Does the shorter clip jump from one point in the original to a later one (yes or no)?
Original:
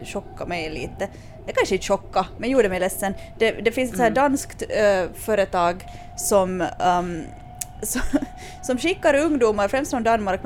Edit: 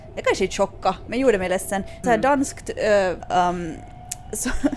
yes